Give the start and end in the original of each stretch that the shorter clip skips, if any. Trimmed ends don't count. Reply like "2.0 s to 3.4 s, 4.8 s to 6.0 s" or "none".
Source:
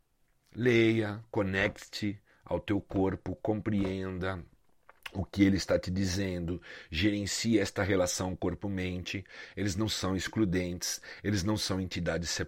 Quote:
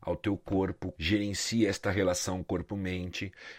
3.4 s to 6.9 s

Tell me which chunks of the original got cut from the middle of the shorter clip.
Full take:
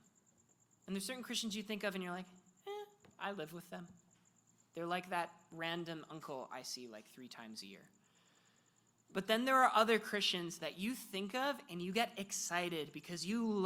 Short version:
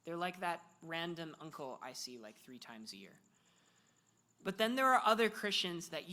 none

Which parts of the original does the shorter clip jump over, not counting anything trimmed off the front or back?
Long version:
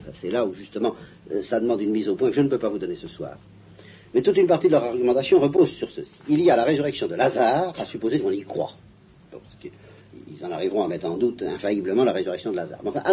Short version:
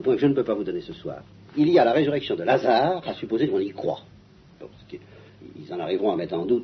3.6 s to 6.2 s

